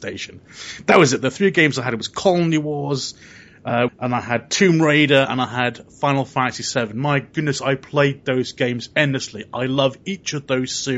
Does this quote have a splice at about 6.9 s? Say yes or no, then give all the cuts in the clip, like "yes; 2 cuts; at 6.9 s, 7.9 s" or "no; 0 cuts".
no; 1 cut; at 3.9 s